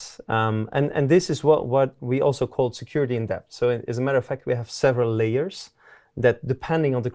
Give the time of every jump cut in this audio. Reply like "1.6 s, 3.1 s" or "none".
none